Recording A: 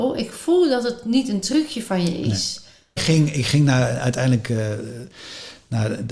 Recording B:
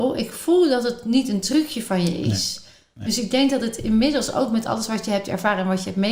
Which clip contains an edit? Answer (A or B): A